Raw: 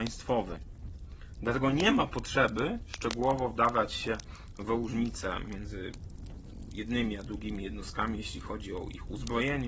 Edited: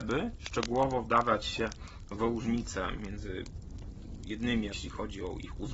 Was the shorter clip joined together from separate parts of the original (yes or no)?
yes